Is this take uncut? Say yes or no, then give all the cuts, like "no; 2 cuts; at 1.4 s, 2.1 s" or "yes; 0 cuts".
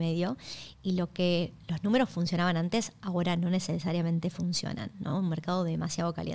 yes; 0 cuts